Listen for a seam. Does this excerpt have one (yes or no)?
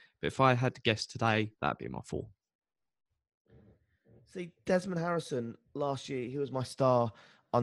yes